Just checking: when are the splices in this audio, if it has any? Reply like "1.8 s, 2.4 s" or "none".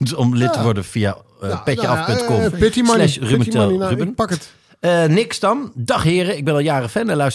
none